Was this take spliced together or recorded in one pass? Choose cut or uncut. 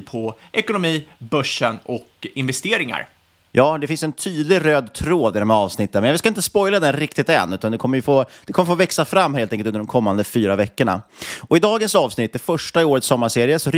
uncut